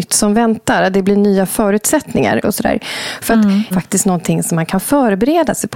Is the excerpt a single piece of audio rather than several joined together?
no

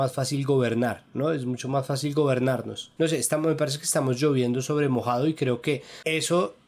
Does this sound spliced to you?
yes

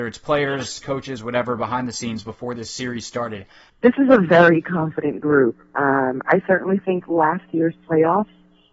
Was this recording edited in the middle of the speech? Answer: yes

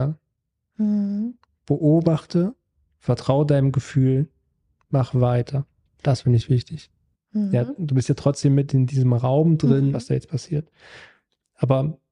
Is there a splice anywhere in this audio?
yes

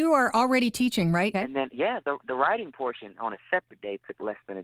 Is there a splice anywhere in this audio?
yes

